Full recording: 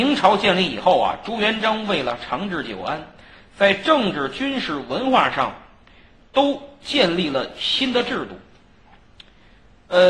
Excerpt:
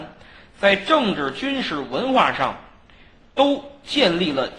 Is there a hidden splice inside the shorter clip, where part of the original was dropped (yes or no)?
no